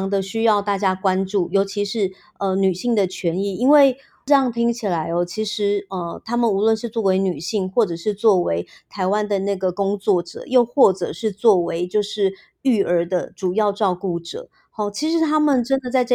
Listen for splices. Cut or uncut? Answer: uncut